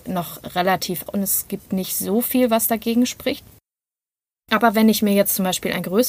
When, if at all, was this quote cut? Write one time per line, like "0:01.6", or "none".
0:01.1